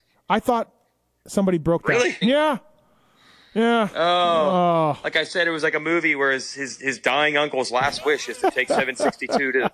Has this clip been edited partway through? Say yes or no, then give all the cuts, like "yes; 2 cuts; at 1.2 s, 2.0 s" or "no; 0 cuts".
yes; 1 cut; at 2.2 s